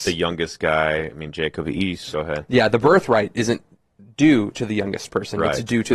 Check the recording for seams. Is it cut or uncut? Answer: cut